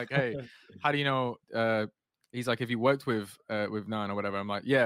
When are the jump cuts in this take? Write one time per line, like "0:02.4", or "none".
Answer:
0:01.4